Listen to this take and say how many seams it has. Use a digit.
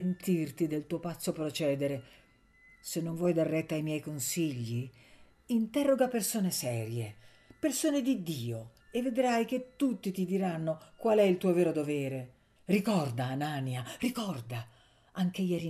2